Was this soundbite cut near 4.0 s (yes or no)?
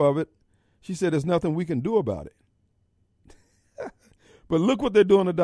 no